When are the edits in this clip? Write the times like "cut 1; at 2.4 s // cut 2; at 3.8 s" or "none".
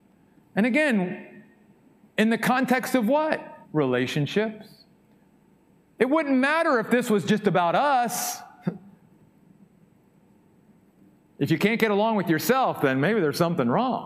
cut 1; at 3.6 s